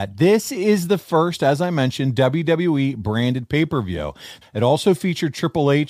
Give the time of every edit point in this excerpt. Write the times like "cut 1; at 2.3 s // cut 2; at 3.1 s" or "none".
cut 1; at 4.4 s